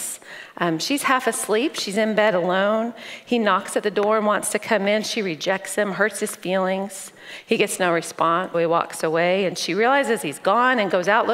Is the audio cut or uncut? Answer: cut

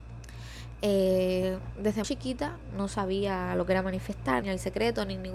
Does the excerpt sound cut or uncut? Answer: cut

